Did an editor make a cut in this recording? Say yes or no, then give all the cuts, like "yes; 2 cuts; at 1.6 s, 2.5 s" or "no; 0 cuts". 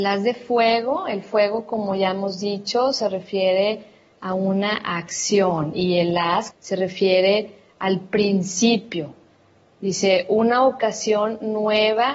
yes; 1 cut; at 6.5 s